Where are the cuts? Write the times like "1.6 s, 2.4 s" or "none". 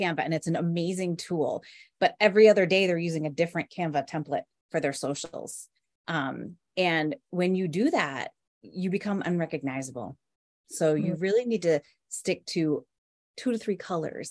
none